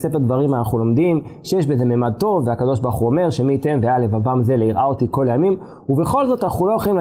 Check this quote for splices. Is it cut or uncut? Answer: uncut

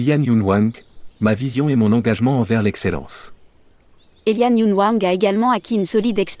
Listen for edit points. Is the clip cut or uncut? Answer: cut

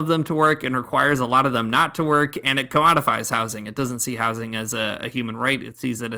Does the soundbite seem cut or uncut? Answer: uncut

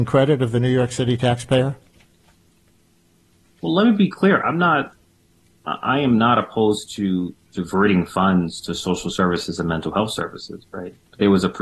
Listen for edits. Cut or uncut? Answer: uncut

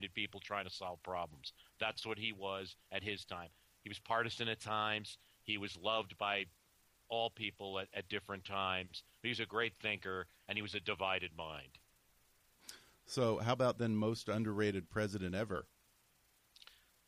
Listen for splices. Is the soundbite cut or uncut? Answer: uncut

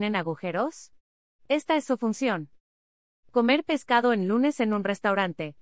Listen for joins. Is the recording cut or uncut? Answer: uncut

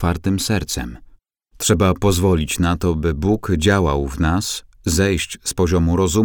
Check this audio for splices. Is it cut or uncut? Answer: uncut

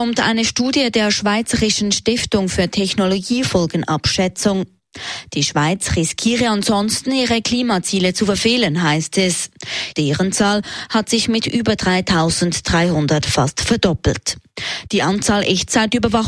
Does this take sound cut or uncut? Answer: cut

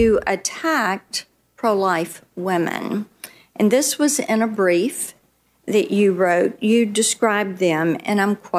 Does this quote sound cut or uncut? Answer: uncut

